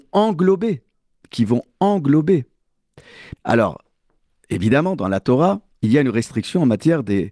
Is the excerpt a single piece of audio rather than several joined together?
no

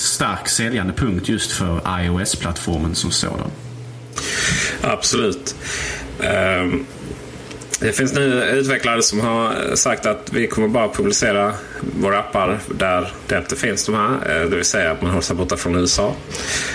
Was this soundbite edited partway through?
no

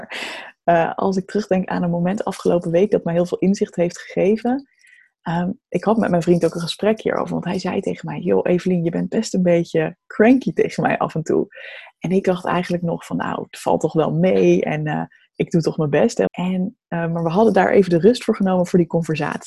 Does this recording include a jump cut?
yes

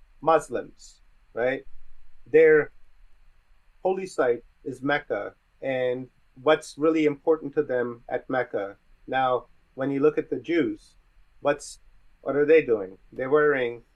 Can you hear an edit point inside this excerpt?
yes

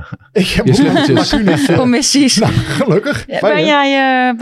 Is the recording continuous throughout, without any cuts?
no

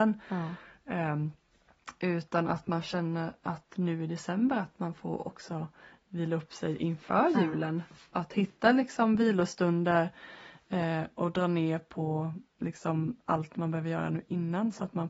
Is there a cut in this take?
no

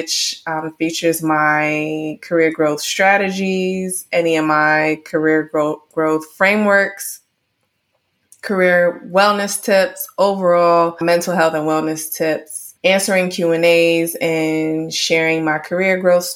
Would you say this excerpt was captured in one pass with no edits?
no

